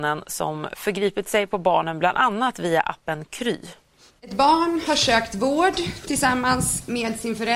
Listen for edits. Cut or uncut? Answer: cut